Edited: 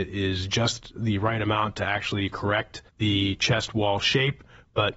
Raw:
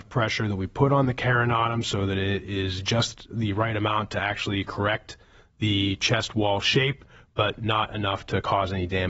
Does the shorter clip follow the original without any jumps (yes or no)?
no